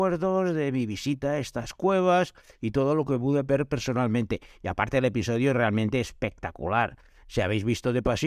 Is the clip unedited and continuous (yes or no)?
yes